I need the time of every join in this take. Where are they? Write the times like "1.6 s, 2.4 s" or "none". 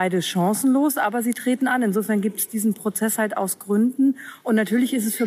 none